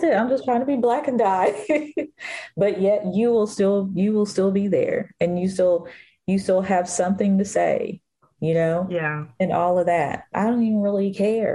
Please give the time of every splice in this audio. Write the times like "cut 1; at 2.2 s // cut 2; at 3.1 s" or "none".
cut 1; at 10.3 s